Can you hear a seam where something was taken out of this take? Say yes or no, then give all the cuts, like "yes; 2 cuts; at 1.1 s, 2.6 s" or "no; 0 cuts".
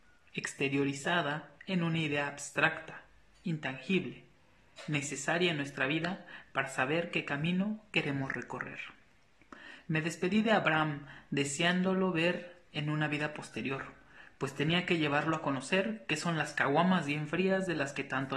no; 0 cuts